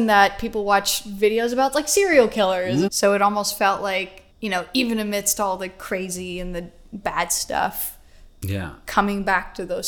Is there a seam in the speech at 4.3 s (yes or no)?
yes